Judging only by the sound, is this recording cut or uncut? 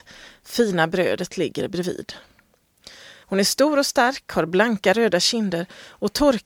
cut